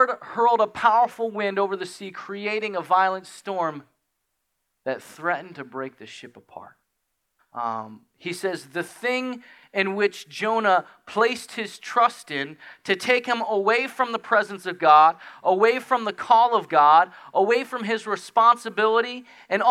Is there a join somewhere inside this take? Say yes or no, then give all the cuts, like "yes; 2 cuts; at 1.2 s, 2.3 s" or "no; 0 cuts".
yes; 1 cut; at 7.4 s